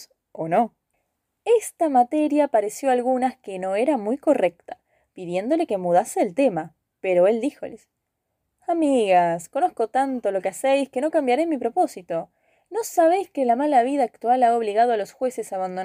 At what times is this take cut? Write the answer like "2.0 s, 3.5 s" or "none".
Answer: none